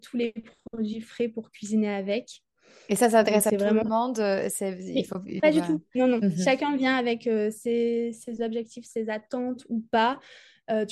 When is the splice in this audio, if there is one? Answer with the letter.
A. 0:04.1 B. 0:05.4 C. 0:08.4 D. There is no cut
B